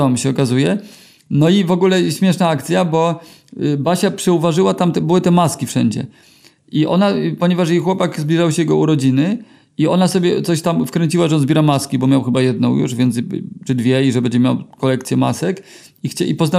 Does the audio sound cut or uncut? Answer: uncut